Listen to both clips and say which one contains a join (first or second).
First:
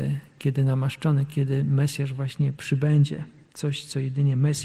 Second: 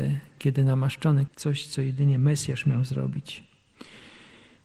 second